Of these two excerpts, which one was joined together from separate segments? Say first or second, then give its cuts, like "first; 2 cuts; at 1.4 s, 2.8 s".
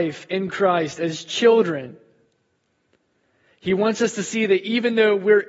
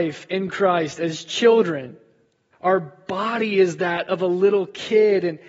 second; 1 cut; at 2.5 s